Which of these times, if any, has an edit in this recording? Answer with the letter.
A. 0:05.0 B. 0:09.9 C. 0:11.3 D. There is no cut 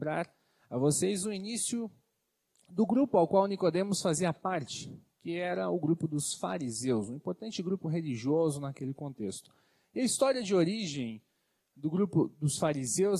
D